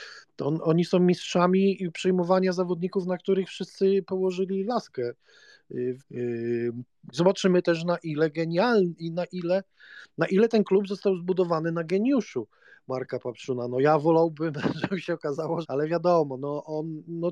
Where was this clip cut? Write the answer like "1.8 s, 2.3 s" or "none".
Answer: 6.0 s, 7.1 s, 15.6 s